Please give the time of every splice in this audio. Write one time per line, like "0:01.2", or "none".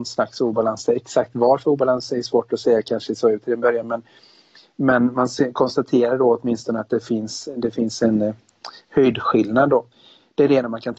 none